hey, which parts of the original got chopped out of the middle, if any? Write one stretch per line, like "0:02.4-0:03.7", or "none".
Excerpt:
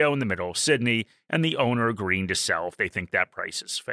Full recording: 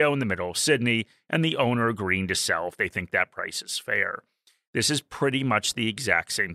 none